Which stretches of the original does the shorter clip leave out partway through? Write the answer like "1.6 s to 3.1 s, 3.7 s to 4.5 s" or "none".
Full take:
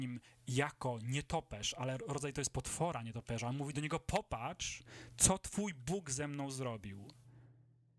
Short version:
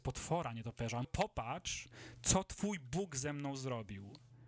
3.5 s to 4.0 s